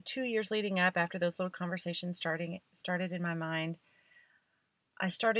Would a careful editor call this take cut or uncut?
uncut